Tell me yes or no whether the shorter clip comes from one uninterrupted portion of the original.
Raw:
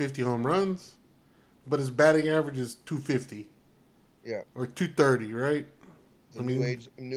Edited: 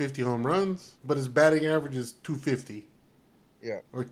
no